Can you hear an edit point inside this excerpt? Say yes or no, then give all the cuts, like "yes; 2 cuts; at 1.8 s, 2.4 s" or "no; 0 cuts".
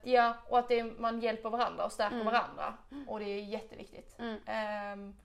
no; 0 cuts